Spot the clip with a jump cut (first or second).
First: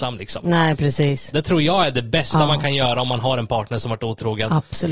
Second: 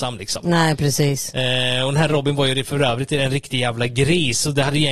first